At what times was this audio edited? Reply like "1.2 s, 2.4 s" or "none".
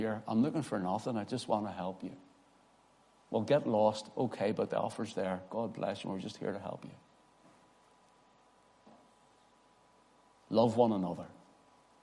none